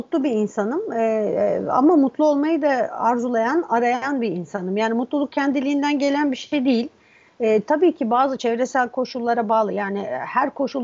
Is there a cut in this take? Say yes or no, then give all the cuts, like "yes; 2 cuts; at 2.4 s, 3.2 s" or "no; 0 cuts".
no; 0 cuts